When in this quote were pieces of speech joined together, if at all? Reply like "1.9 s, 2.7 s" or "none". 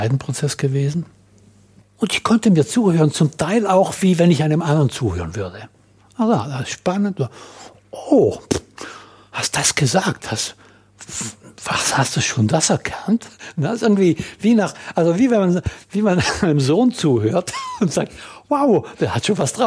1.8 s